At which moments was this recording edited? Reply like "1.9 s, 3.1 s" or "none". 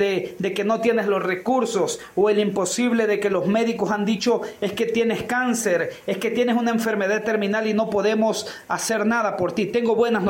none